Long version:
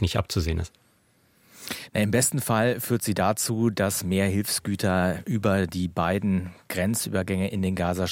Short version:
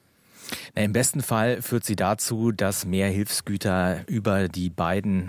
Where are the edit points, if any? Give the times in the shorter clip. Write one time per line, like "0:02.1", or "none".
none